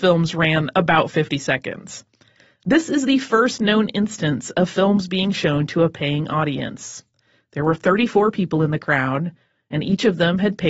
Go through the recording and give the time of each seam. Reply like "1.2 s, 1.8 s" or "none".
none